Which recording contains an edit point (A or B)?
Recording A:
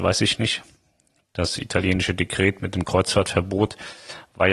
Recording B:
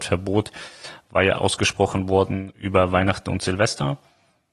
B